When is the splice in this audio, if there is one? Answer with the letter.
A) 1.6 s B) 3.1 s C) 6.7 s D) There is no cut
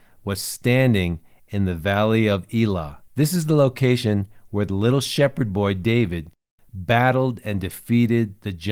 B